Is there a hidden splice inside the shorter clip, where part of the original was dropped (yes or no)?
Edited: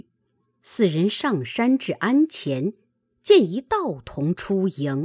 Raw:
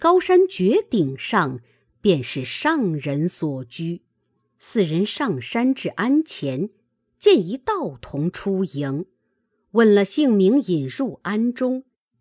no